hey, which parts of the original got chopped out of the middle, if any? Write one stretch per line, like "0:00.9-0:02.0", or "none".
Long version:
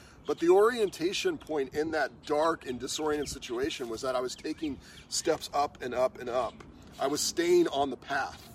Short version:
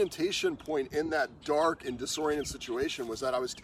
none